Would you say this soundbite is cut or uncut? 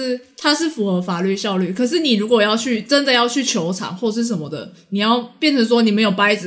uncut